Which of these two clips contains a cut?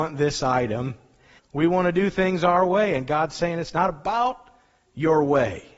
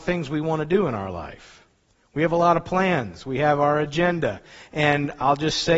first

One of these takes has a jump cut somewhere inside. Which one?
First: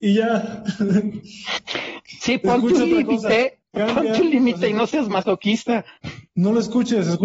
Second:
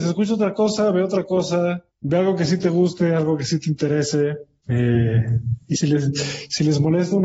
second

